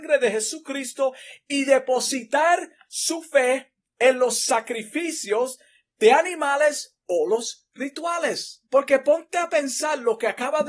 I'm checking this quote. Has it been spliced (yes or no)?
yes